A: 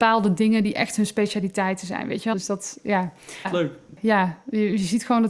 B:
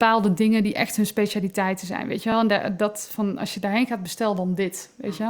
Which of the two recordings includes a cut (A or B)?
A